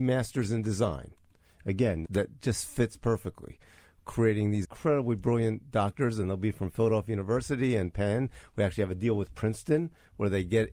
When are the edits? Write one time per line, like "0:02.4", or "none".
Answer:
0:02.0
0:04.6